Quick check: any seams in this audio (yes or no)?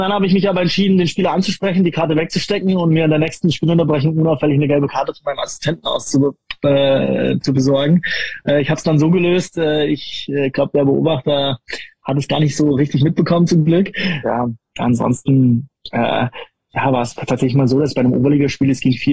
yes